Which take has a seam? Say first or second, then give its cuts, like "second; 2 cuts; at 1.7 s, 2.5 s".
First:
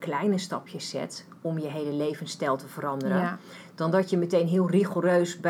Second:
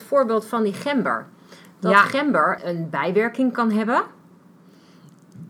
second; 1 cut; at 2.6 s